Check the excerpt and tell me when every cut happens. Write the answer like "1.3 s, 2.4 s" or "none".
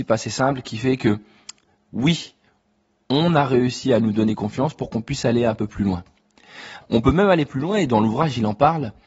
6.8 s